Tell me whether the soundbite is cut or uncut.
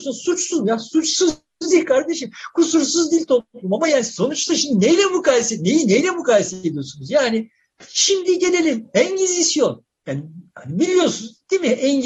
uncut